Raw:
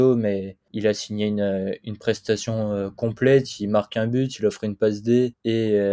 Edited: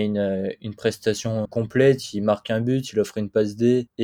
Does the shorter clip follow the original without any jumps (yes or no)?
no